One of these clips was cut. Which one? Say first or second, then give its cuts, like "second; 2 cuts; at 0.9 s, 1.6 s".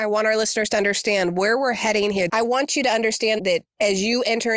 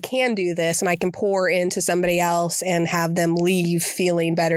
first; 2 cuts; at 2.3 s, 3.4 s